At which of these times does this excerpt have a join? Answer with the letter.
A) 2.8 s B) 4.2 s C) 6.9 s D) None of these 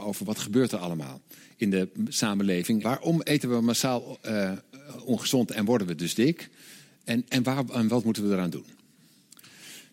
A